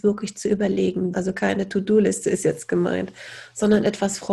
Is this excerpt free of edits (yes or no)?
no